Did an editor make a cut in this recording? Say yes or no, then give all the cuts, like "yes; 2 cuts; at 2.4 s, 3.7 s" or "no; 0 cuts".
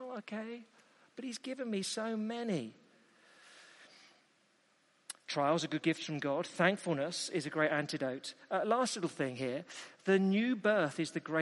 no; 0 cuts